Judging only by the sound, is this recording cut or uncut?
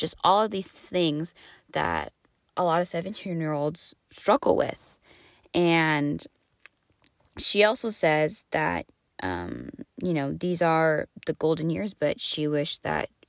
uncut